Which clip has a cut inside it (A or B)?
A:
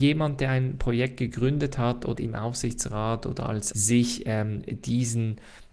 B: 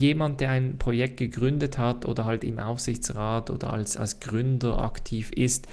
A